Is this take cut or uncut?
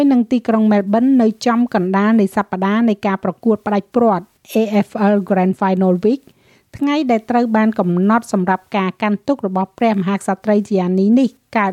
uncut